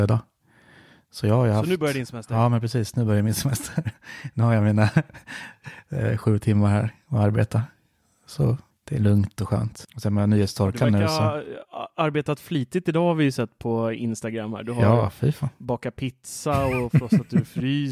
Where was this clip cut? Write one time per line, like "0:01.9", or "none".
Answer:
none